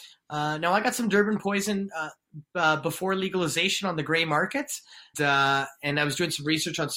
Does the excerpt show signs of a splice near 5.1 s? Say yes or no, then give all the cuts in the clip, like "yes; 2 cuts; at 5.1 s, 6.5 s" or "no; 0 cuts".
yes; 1 cut; at 5.1 s